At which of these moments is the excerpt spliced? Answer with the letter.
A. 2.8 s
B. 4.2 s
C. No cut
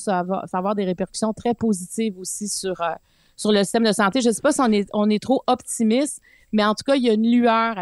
C